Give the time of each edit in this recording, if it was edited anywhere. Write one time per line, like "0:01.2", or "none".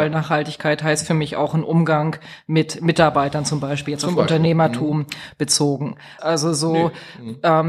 0:06.2